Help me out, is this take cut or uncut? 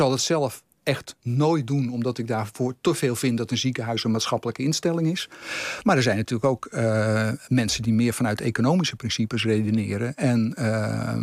uncut